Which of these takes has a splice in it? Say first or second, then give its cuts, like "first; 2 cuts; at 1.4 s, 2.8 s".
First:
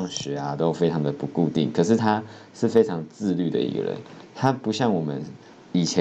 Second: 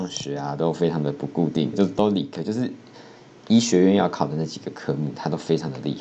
second; 1 cut; at 1.7 s